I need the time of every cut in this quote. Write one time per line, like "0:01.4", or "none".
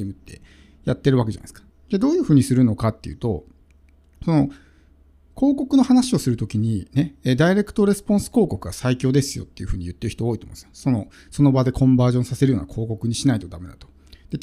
0:01.7